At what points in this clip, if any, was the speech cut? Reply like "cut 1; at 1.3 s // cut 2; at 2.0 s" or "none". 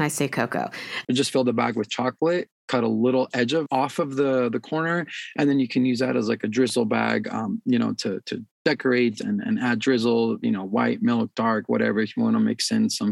cut 1; at 1.0 s